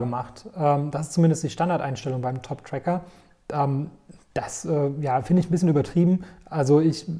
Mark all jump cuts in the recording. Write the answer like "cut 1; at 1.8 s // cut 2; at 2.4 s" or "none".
none